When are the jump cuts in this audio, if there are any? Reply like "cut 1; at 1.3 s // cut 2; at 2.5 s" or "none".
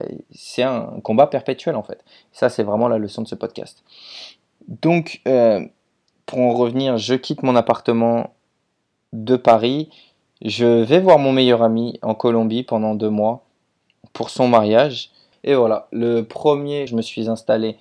cut 1; at 15.3 s // cut 2; at 16.9 s